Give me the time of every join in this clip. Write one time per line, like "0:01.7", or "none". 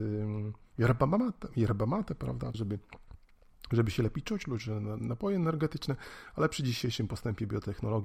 0:02.5